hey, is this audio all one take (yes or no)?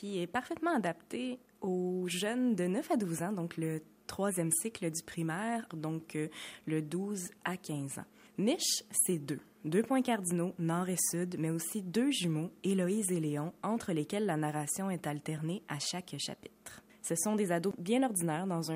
no